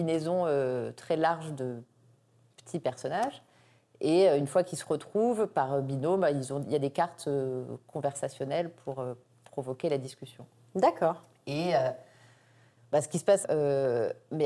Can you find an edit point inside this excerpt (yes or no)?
yes